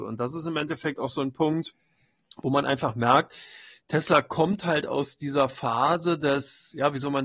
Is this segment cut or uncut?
uncut